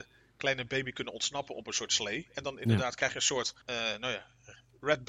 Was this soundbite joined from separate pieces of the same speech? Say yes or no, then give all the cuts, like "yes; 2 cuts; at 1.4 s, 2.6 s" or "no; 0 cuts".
yes; 1 cut; at 3.6 s